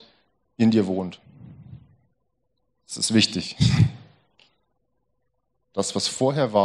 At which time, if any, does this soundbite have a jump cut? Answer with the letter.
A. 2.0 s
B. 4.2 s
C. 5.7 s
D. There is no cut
C